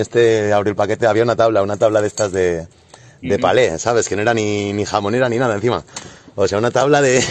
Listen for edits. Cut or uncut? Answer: uncut